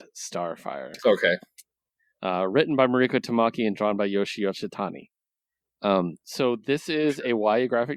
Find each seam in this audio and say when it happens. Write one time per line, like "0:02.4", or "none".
none